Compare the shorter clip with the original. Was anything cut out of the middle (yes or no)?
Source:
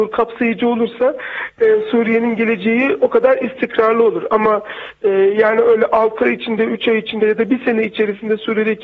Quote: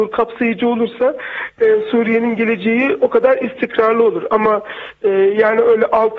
no